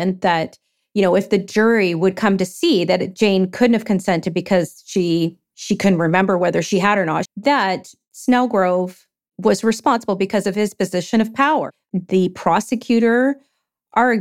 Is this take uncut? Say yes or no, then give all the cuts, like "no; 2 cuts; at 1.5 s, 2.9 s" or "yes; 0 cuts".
no; 2 cuts; at 7.3 s, 11.8 s